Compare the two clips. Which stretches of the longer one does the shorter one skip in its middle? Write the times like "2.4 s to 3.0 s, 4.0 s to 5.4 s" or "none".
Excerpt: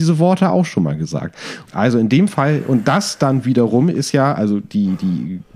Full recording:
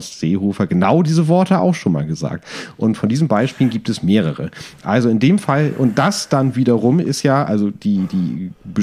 2.8 s to 4.8 s